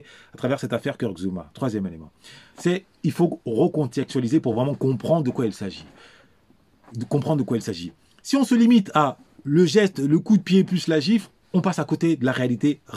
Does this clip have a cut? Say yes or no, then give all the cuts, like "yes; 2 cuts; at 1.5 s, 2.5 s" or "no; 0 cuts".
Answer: no; 0 cuts